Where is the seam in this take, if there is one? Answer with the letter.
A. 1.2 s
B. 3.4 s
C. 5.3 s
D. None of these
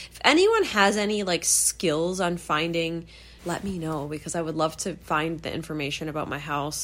B